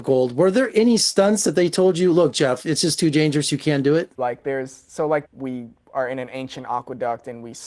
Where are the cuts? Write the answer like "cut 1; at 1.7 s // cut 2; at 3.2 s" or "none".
cut 1; at 4.2 s // cut 2; at 5.2 s